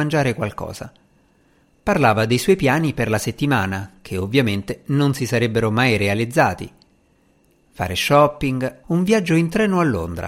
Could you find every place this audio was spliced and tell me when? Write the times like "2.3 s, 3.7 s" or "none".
8.8 s